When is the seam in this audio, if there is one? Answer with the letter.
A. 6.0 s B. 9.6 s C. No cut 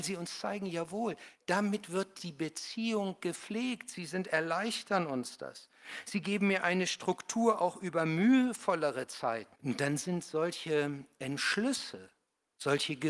B